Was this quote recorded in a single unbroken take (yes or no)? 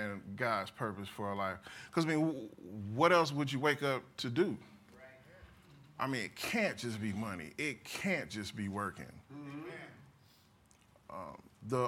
yes